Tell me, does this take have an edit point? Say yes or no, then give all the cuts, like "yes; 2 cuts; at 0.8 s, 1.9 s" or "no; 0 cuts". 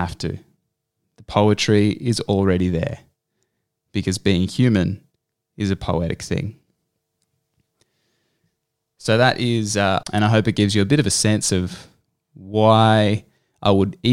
yes; 1 cut; at 10.0 s